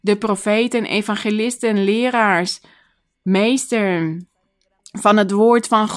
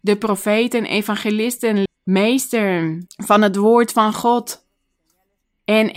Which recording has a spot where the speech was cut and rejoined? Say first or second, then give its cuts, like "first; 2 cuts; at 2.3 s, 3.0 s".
second; 2 cuts; at 1.9 s, 3.1 s